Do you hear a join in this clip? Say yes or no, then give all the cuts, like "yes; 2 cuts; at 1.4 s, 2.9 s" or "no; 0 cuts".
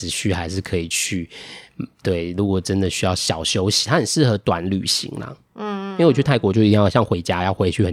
no; 0 cuts